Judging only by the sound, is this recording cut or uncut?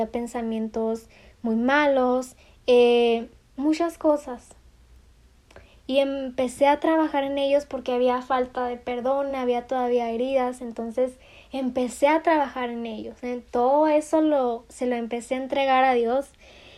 uncut